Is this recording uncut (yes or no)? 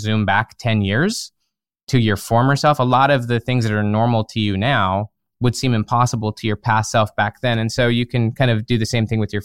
yes